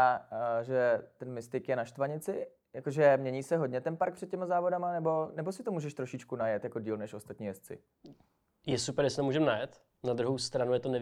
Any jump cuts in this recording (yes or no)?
no